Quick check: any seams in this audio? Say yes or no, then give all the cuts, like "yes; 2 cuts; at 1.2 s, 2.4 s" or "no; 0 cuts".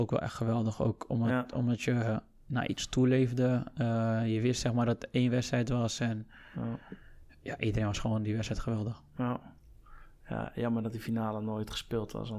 no; 0 cuts